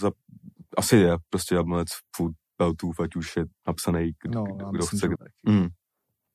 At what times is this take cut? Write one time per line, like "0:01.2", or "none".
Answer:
0:05.2